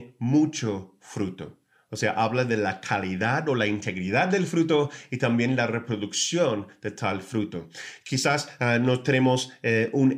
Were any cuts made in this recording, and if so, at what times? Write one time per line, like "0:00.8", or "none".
none